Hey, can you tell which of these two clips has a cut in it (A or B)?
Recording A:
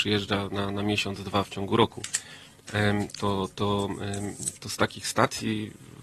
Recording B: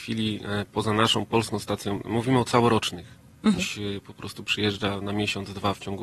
B